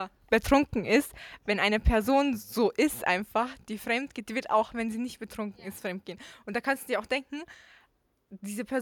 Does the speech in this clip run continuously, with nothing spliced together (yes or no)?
yes